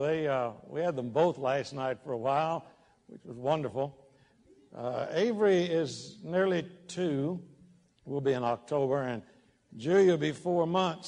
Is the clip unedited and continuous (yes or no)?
yes